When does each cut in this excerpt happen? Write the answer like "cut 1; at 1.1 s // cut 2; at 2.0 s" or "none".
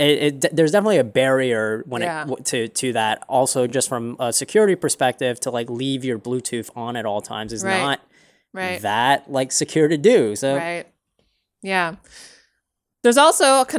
none

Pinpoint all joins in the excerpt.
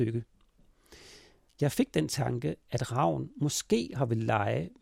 none

